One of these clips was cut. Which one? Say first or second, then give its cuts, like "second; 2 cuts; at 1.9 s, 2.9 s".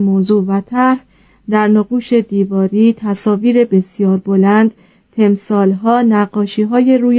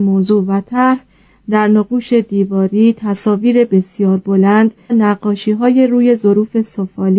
second; 1 cut; at 4.9 s